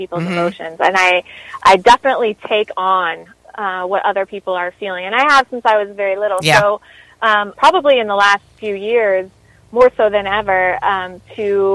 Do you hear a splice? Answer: yes; 1 cut; at 7.5 s

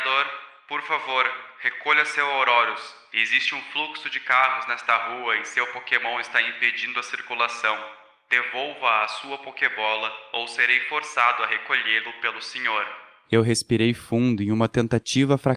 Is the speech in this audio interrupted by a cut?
no; 0 cuts

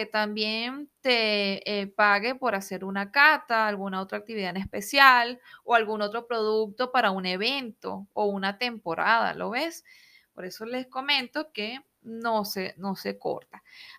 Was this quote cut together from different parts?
no; 0 cuts

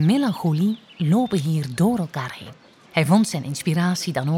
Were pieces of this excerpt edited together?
yes; 1 cut; at 2.9 s

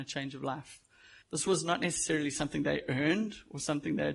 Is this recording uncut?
no; 1 cut; at 1.2 s

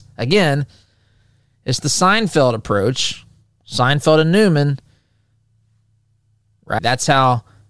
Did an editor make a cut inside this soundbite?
yes; 1 cut; at 6.8 s

